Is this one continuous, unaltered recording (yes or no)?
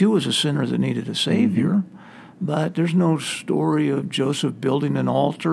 yes